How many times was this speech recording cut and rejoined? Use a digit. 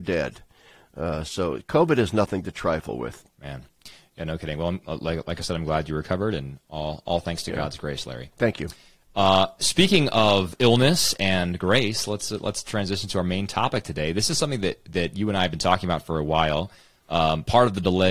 1